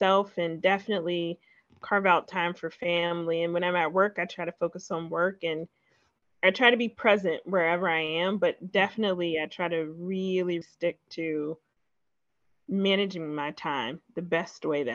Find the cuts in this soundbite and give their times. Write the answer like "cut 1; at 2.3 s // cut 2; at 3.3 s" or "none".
cut 1; at 10.6 s